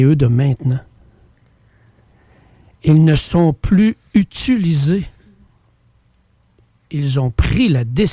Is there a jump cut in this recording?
no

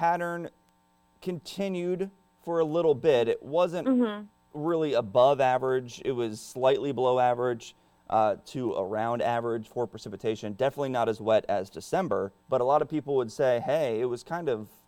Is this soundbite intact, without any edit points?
no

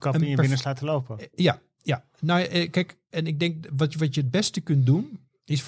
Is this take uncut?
yes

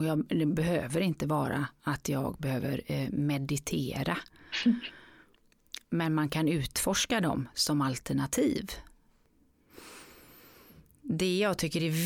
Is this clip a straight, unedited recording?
yes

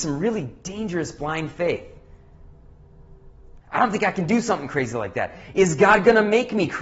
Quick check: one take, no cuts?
no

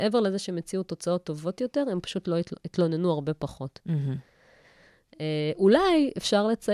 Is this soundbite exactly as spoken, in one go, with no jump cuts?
yes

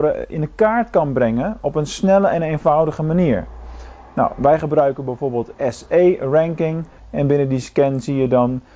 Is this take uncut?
no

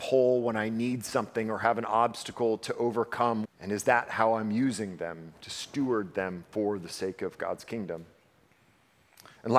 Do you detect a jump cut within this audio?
yes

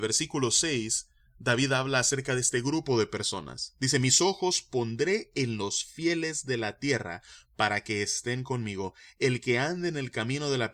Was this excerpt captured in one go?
yes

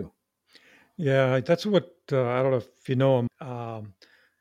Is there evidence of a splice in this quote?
yes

